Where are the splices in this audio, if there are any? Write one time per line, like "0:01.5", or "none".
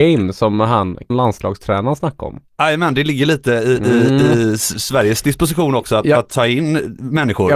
0:01.1